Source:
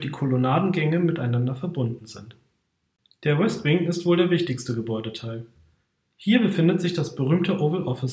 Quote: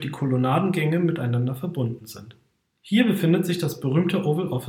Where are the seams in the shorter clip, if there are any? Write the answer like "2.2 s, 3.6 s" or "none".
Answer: 2.7 s

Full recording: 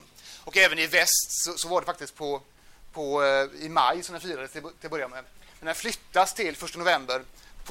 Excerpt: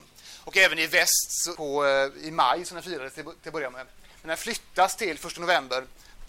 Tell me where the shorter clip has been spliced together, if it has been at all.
1.5 s

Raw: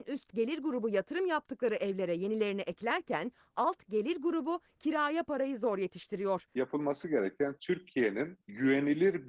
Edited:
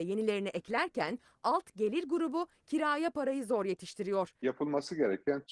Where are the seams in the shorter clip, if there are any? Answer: none

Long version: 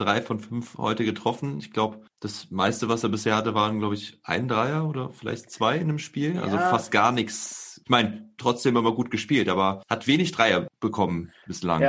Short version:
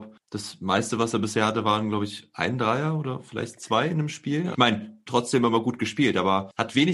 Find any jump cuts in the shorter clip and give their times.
4.5 s

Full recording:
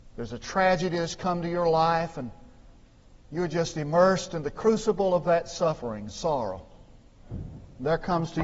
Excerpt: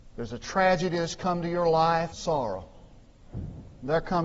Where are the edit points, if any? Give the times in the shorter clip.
2.1 s

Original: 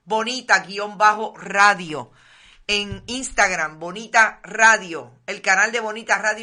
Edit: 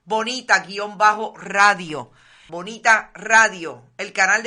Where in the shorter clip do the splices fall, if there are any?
2.5 s

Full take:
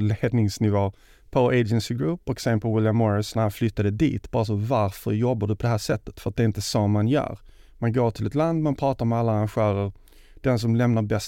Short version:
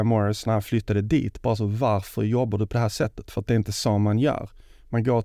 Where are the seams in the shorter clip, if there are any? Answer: none

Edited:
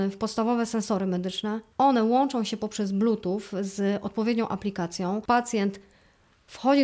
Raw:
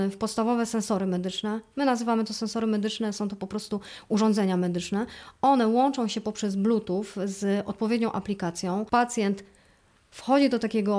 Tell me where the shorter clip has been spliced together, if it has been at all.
1.7 s

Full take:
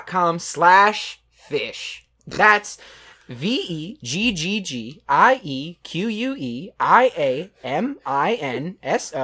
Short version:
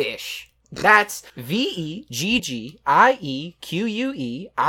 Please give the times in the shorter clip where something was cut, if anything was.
1.3 s, 2.4 s

